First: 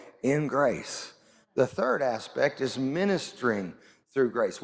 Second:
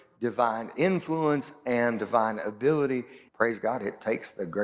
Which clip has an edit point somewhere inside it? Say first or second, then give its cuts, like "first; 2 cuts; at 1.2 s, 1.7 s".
second; 1 cut; at 3.3 s